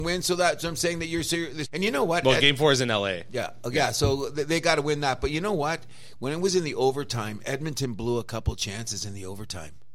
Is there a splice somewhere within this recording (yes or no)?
yes